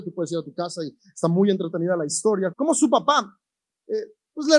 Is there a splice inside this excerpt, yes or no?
yes